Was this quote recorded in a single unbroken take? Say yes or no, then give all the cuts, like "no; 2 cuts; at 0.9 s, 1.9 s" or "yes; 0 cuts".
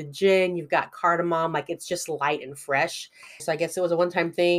no; 1 cut; at 3.4 s